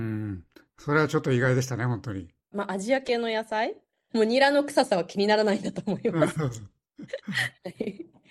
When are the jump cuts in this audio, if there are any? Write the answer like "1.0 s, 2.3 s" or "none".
2.5 s, 4.1 s

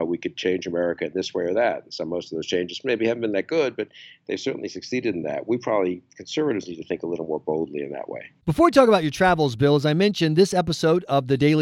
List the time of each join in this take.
none

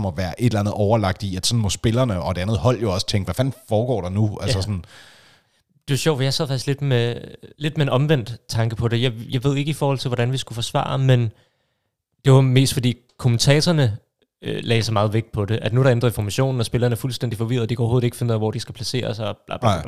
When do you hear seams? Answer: 7.5 s

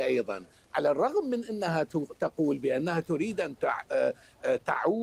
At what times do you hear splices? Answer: none

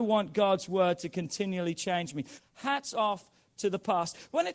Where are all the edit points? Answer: 2.4 s

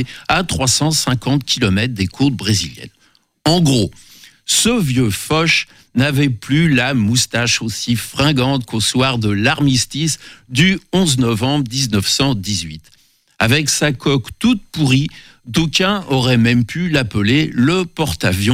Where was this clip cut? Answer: none

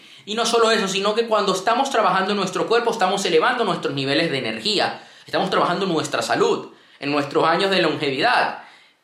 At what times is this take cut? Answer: none

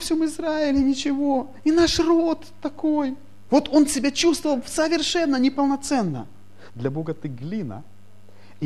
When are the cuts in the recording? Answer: 3.5 s, 6.7 s

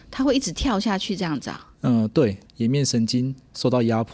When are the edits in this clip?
2.4 s

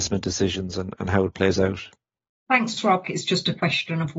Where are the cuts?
3.0 s

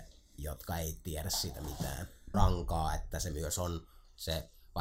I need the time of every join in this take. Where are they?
2.3 s

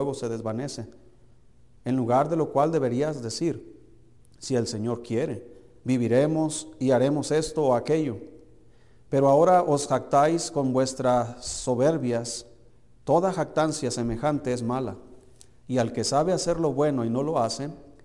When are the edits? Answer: none

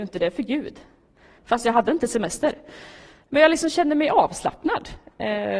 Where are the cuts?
1.4 s

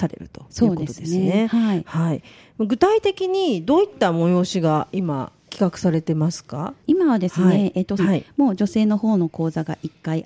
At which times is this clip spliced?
6.8 s, 8.0 s

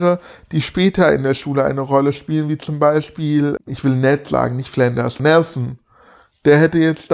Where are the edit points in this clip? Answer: 3.6 s, 5.2 s

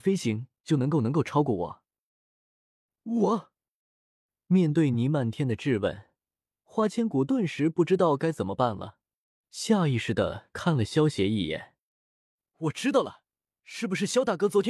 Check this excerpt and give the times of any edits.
none

